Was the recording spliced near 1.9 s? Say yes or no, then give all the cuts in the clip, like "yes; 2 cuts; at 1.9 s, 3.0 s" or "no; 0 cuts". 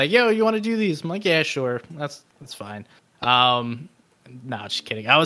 no; 0 cuts